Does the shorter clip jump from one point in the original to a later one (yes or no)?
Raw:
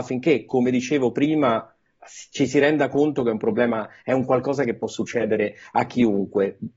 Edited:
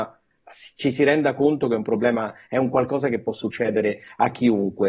no